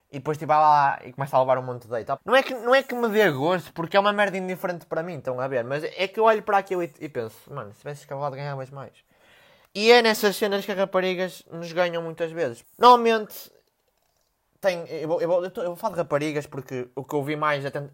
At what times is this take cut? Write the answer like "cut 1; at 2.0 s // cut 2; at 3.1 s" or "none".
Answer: cut 1; at 2.2 s // cut 2; at 12.6 s